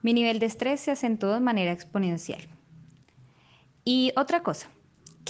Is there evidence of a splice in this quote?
no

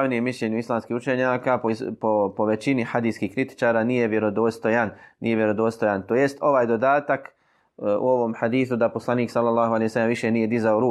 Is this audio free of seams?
yes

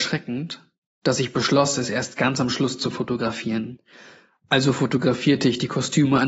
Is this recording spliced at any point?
no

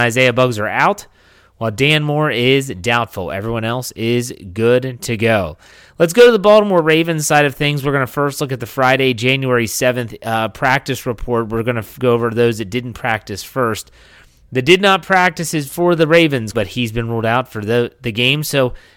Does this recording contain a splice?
yes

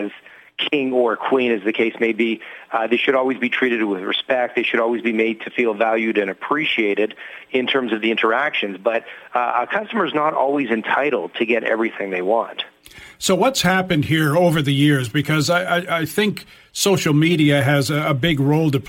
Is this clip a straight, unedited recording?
yes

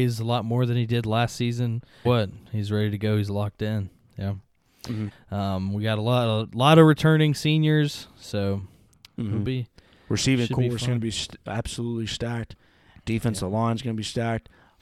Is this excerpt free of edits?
no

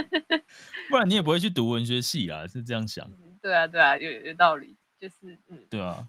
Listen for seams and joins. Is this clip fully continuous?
no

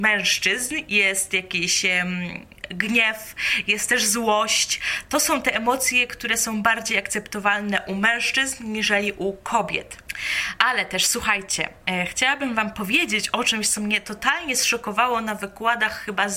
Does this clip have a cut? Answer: no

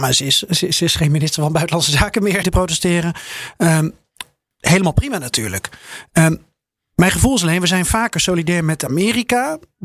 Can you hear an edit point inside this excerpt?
yes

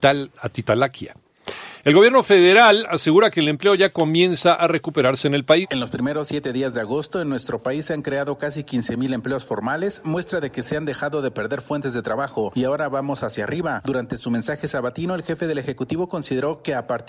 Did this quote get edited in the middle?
yes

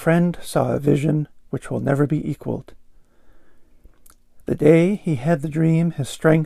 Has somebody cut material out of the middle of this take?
no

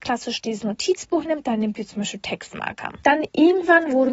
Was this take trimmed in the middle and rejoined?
yes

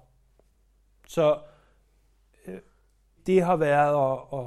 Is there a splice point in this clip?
yes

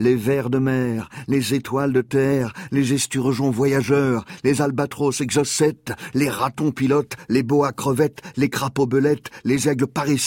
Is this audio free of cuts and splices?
yes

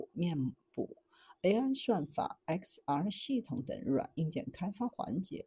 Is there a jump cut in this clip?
no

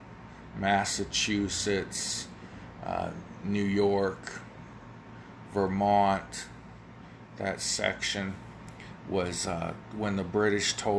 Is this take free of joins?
yes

